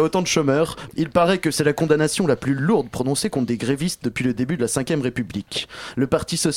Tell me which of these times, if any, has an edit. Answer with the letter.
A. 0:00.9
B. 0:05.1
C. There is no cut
A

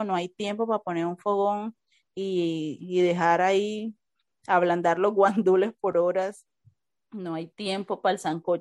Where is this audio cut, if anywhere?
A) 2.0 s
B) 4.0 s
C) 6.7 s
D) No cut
D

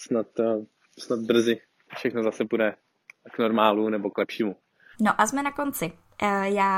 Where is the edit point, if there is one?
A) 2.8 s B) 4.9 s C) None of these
B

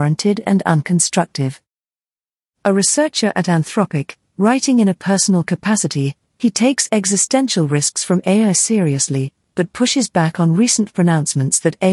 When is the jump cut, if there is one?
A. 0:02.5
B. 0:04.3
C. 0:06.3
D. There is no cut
A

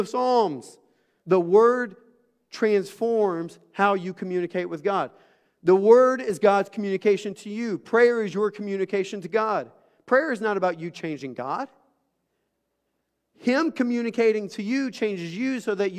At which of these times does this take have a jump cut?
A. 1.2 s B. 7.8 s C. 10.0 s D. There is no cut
A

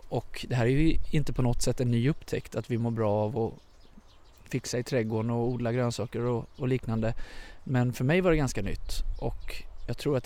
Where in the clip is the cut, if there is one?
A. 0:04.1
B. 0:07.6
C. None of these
C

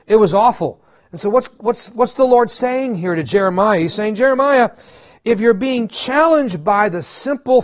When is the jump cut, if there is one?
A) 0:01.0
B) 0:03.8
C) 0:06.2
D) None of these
D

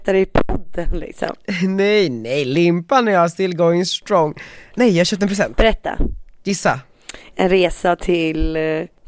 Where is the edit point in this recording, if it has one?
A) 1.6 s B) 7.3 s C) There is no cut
C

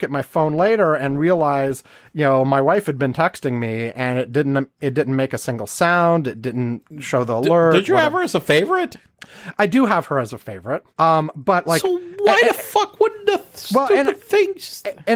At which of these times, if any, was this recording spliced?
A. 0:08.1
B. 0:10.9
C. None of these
B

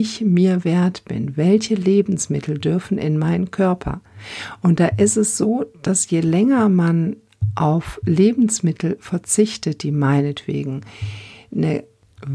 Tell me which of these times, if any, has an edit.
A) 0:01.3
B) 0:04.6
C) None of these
C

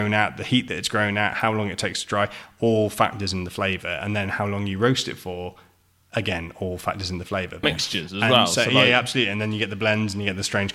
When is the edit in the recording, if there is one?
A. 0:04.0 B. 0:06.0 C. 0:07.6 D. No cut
C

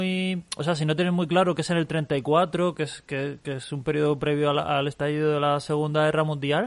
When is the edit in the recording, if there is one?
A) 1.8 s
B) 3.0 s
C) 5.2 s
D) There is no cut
D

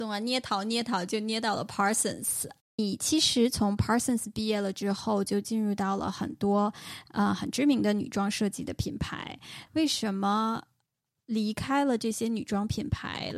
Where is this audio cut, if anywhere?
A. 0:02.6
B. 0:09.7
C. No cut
B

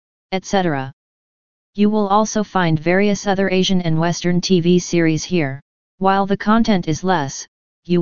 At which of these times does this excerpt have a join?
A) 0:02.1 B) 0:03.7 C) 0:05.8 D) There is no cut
C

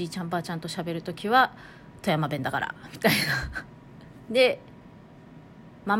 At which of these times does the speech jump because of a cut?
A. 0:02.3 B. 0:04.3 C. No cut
B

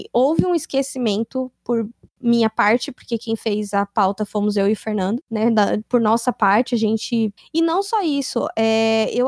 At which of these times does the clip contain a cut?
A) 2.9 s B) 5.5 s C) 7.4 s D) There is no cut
C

